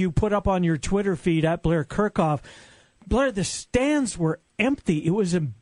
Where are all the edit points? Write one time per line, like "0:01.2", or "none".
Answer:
none